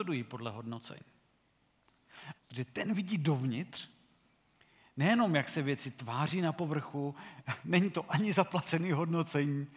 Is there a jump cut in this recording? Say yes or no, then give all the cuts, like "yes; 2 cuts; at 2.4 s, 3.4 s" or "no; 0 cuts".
yes; 1 cut; at 2.4 s